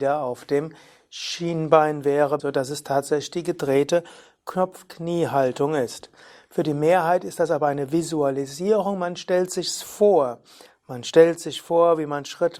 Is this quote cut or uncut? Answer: cut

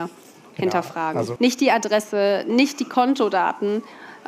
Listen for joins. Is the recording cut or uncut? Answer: cut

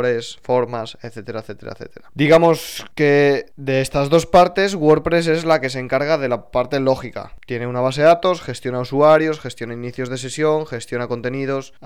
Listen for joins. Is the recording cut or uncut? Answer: uncut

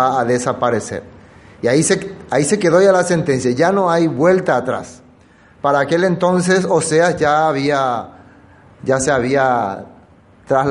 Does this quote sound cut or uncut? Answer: uncut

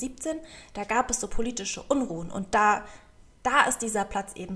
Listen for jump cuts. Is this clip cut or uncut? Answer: uncut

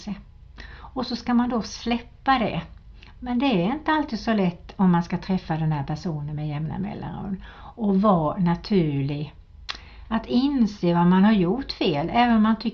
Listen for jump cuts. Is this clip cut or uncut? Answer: cut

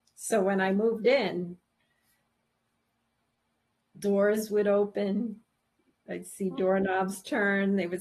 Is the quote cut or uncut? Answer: uncut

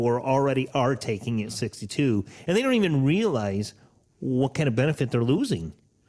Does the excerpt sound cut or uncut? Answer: uncut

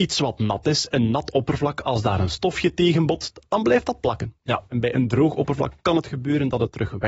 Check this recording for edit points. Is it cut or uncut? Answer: uncut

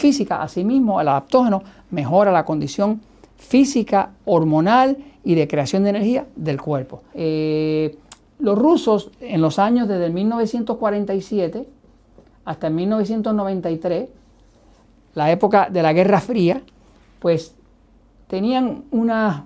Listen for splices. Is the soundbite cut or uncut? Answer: cut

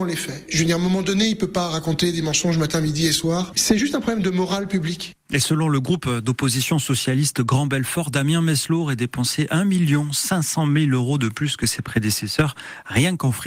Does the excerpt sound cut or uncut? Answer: uncut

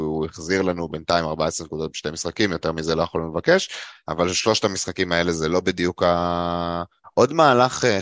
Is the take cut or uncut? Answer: cut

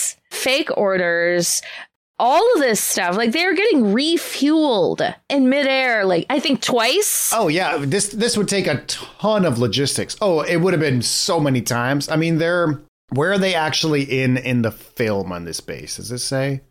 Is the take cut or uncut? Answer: uncut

